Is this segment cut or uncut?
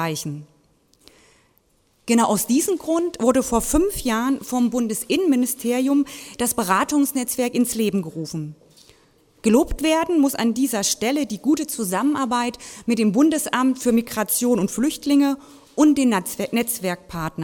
uncut